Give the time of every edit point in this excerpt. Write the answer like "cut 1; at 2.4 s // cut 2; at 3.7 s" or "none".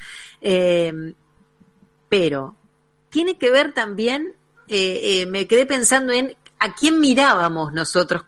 none